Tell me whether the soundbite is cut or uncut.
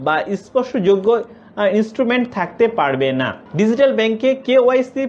cut